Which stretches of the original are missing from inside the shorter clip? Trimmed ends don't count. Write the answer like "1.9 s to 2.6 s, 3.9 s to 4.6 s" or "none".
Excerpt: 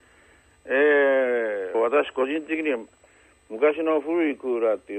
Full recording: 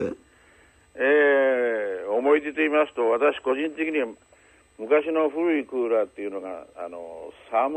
2.0 s to 3.0 s